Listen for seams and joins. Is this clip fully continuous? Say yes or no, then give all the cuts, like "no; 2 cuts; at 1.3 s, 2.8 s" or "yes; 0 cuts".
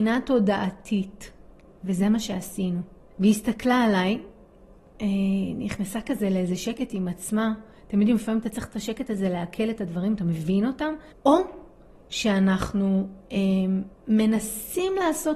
no; 3 cuts; at 3.1 s, 11.1 s, 14.0 s